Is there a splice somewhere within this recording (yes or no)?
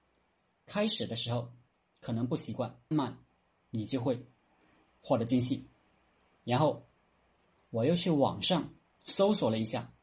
yes